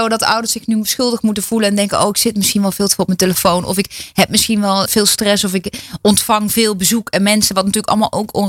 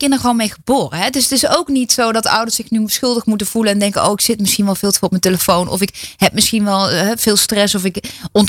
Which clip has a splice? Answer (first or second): first